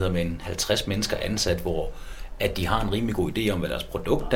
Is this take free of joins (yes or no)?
yes